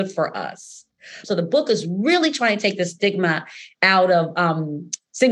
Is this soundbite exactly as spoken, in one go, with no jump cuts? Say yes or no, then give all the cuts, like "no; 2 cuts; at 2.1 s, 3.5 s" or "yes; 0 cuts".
no; 1 cut; at 1.2 s